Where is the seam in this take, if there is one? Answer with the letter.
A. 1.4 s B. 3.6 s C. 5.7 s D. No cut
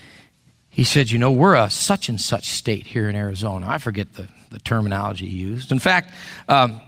C